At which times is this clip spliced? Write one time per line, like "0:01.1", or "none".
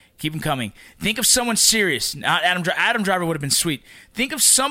none